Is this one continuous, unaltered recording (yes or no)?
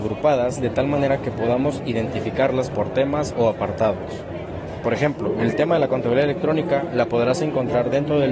no